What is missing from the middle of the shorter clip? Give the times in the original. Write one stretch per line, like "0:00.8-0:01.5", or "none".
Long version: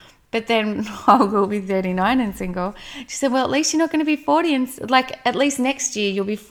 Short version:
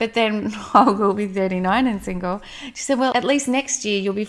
0:03.4-0:05.2